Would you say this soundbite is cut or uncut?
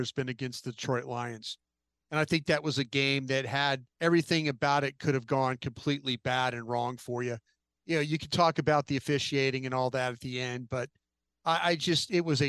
cut